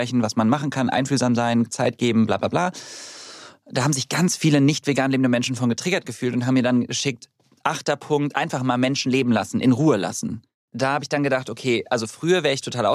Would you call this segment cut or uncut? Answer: uncut